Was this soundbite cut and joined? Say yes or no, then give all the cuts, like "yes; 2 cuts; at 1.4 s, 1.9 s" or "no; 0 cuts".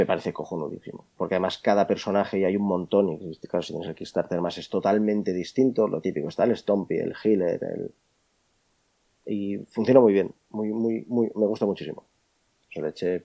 no; 0 cuts